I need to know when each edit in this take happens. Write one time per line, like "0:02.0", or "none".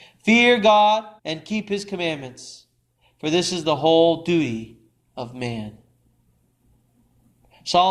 0:01.2